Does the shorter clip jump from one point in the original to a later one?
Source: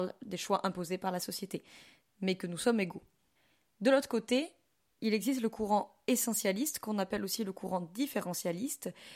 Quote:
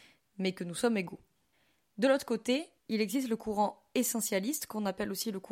yes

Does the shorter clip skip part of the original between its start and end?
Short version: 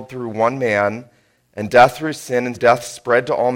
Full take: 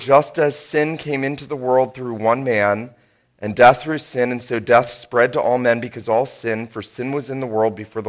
yes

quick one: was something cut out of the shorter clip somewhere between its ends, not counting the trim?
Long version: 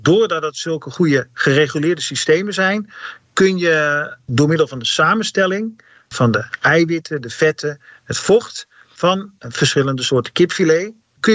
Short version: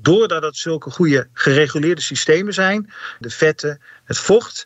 yes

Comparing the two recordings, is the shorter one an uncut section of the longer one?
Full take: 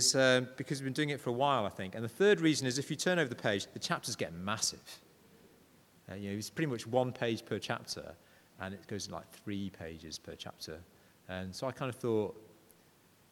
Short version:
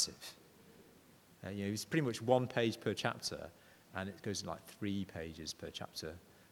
yes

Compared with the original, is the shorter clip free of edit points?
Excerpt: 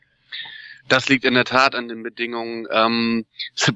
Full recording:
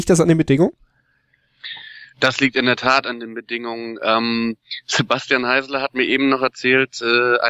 yes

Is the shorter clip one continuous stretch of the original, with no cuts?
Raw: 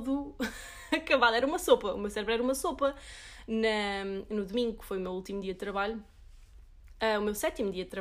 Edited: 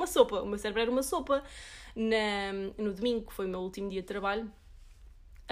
yes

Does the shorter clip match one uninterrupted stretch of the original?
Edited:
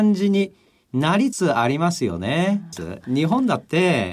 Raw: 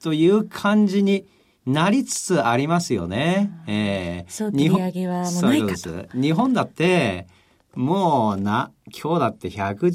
no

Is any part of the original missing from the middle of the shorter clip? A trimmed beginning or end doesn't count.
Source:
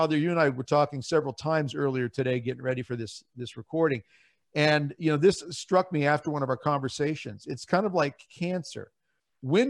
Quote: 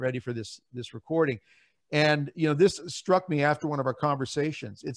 no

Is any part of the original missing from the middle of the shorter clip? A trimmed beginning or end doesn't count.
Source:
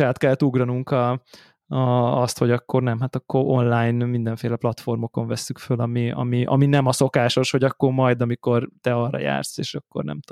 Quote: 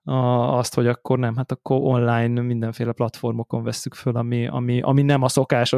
no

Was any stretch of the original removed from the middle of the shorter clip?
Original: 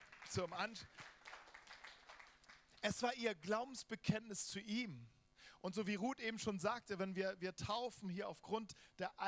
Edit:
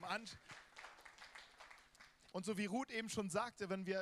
yes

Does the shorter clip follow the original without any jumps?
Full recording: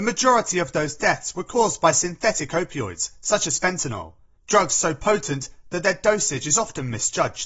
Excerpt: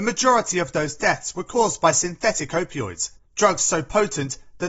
no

